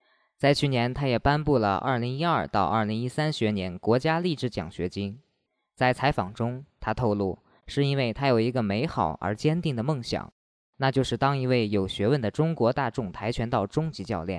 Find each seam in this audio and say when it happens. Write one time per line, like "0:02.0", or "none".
0:07.6